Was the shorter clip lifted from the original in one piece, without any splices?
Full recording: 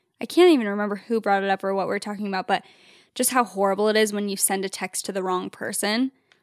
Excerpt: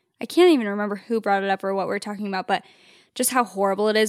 yes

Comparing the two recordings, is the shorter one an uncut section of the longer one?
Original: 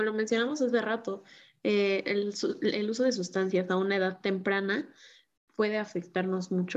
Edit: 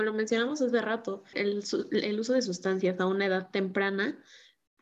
no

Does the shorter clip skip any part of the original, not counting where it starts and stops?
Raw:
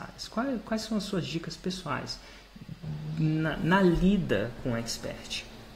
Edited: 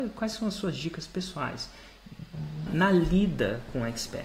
yes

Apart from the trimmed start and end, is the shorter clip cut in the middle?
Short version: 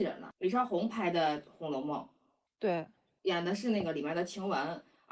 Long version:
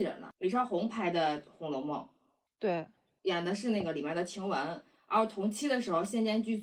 no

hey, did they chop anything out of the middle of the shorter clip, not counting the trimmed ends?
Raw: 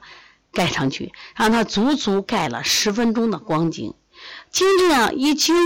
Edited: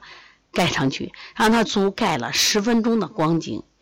yes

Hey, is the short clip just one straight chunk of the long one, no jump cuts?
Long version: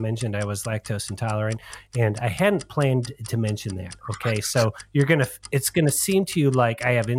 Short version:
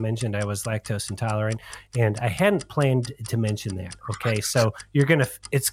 yes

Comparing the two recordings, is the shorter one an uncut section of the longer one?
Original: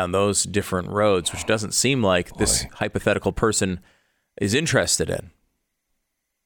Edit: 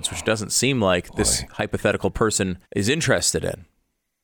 no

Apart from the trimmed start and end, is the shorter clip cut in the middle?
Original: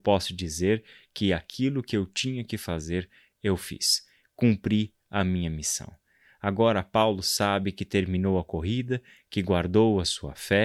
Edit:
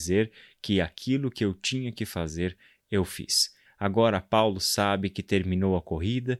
yes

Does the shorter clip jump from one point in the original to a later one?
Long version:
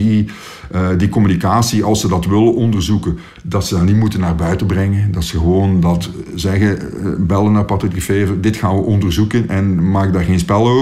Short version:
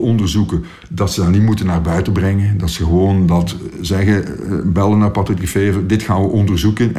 no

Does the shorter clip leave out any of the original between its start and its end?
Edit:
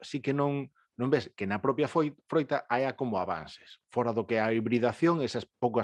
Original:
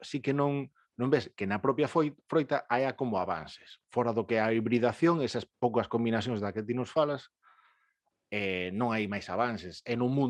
no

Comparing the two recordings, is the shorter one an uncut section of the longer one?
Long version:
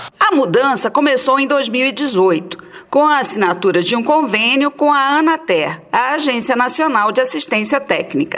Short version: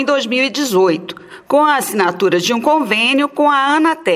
yes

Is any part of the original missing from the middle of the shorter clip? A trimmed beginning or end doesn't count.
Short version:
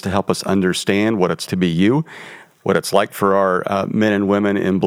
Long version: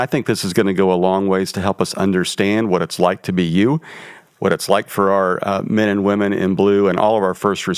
yes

